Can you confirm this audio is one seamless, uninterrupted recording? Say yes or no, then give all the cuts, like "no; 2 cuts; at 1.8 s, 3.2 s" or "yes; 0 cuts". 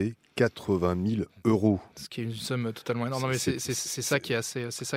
yes; 0 cuts